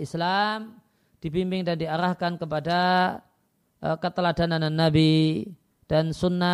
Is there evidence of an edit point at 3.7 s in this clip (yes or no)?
no